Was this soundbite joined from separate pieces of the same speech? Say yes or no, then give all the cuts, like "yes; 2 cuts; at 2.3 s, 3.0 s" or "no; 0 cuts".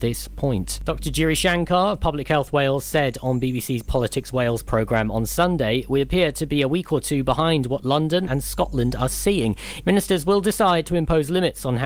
yes; 2 cuts; at 8.3 s, 9.8 s